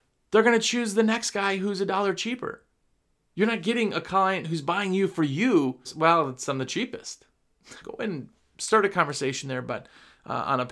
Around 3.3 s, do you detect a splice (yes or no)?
no